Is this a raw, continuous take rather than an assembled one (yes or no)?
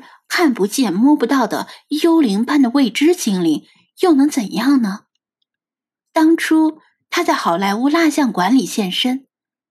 no